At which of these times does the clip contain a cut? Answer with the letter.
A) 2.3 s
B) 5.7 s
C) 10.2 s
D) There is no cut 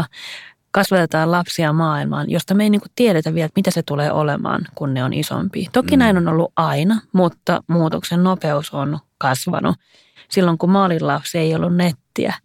C